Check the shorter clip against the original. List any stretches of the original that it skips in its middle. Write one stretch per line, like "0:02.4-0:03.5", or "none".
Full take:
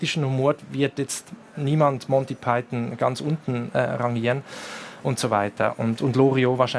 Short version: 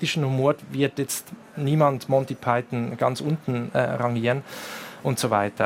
none